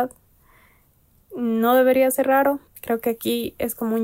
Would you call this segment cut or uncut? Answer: cut